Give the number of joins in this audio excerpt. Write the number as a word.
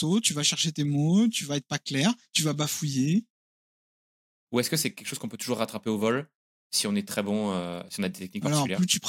one